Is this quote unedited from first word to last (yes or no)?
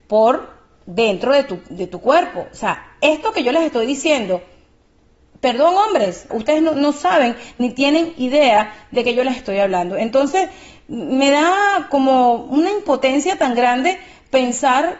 no